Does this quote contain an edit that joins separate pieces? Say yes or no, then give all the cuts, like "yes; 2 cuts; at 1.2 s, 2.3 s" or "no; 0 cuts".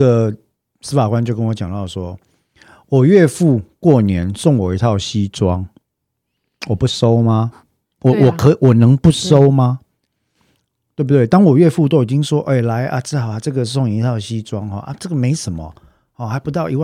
no; 0 cuts